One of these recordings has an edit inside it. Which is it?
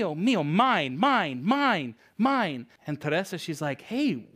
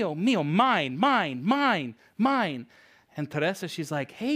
first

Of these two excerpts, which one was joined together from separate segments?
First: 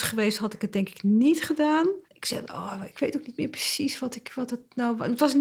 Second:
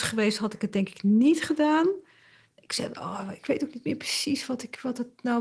first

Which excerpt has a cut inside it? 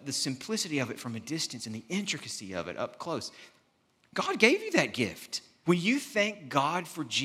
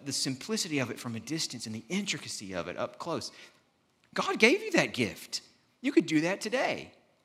first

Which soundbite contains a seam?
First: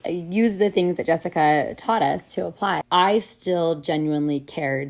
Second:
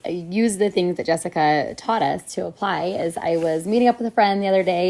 first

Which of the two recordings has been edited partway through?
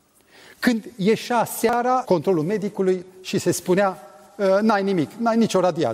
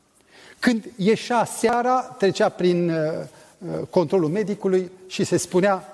first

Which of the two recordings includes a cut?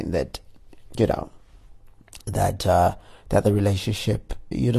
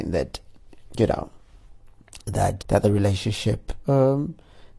second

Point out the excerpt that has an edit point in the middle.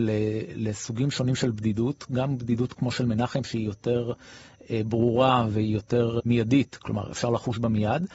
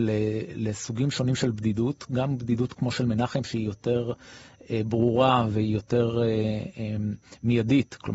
first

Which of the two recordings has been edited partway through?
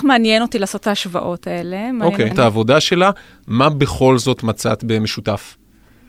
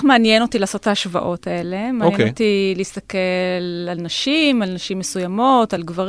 first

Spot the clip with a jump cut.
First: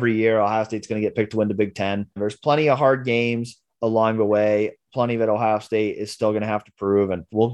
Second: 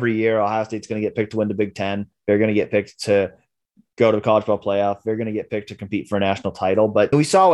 first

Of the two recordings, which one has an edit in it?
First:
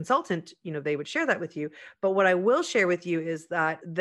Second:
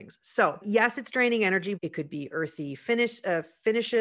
second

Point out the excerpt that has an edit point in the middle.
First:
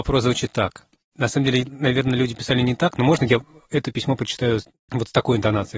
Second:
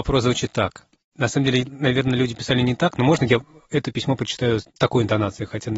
second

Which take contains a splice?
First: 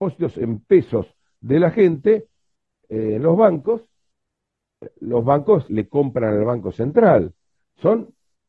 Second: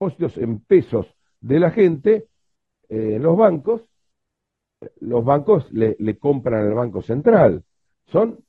first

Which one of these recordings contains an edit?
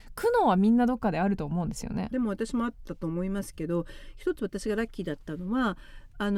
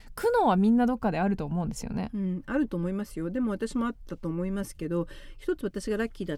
first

